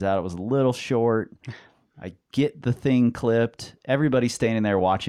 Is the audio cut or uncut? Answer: uncut